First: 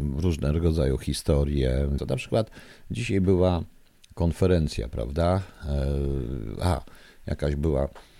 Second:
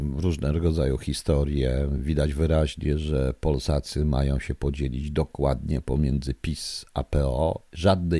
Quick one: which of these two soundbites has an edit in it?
first; 1 cut; at 2.0 s

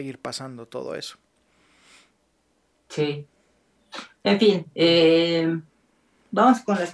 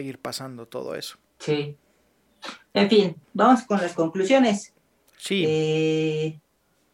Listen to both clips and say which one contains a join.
second; 2 cuts; at 1.3 s, 3.2 s

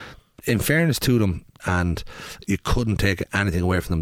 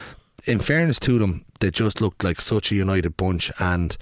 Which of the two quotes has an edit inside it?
first; 1 cut; at 1.6 s

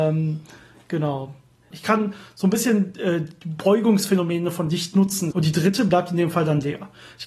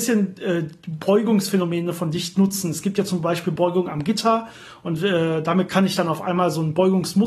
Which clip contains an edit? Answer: first; 2 cuts; at 1.7 s, 5.3 s

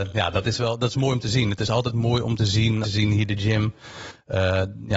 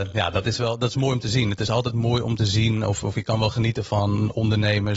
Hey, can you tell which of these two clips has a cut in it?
first; 1 cut; at 2.8 s

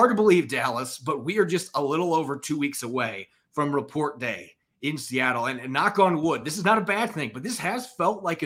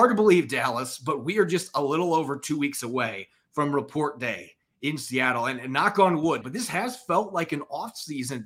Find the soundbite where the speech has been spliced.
second; 1 cut; at 6.4 s

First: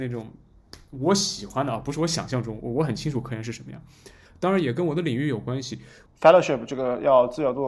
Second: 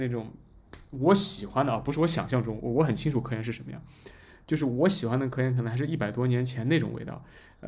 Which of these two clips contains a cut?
first; 2 cuts; at 4.3 s, 6.1 s

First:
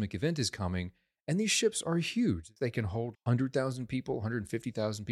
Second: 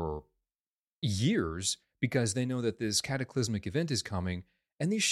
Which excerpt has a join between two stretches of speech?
first; 1 cut; at 3.1 s

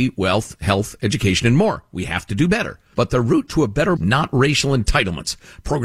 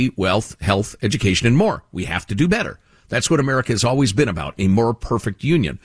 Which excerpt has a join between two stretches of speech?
first; 2 cuts; at 2.9 s, 4.0 s

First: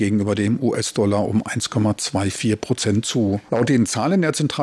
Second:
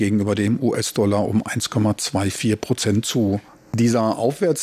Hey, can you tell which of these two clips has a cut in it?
first; 1 cut; at 3.5 s

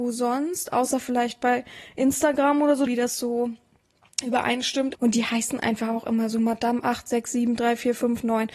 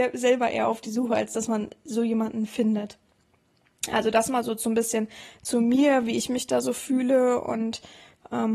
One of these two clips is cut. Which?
first; 2 cuts; at 2.9 s, 4.9 s

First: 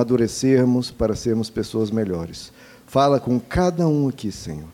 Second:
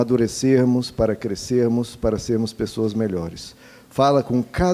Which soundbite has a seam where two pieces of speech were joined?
first; 1 cut; at 0.9 s

